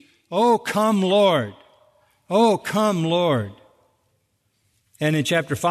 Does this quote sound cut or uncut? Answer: uncut